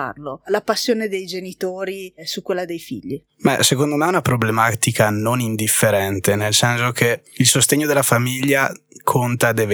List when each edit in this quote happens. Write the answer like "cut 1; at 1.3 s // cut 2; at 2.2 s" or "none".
none